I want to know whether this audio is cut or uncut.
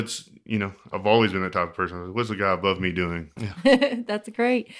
cut